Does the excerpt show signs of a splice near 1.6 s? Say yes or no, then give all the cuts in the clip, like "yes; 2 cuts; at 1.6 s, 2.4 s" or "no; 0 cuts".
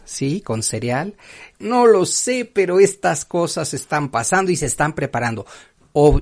yes; 1 cut; at 1.6 s